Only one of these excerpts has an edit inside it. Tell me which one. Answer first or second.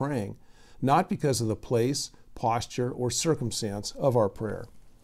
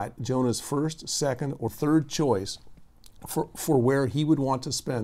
second